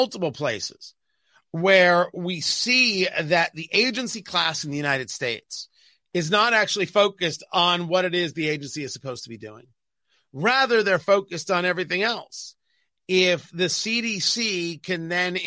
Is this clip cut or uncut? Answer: uncut